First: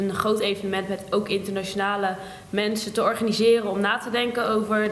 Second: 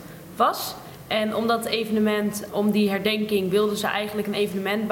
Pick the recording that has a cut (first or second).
second